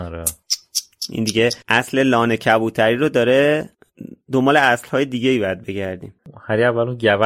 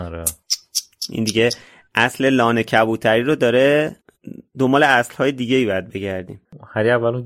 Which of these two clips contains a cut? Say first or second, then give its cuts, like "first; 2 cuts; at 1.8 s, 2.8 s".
first; 1 cut; at 1.6 s